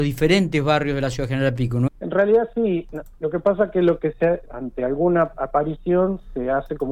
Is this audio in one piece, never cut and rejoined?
no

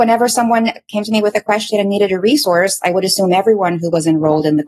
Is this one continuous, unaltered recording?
yes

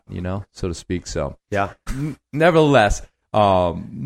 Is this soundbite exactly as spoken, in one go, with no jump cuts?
no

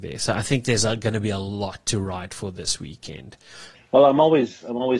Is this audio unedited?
no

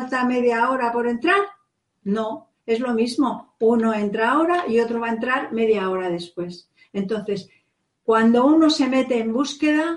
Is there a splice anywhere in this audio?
no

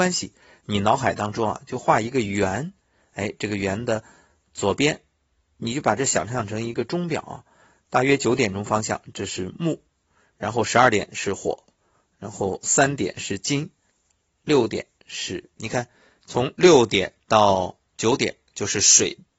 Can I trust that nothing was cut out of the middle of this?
no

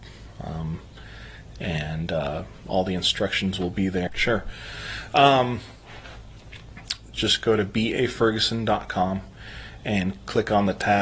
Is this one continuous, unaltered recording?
no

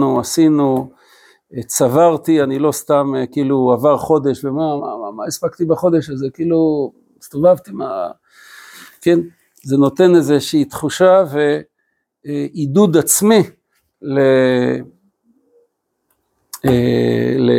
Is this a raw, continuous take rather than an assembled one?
no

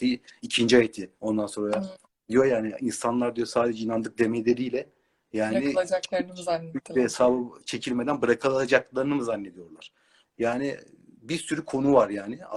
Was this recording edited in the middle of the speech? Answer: yes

